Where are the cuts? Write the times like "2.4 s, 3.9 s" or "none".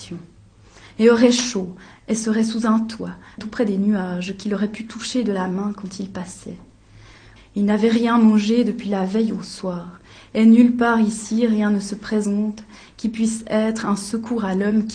3.4 s, 7.4 s